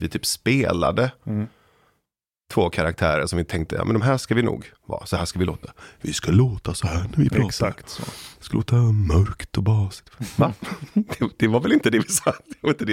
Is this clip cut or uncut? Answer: uncut